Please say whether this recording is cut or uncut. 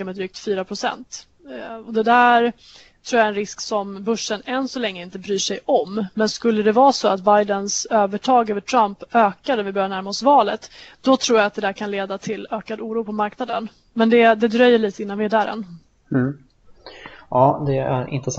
uncut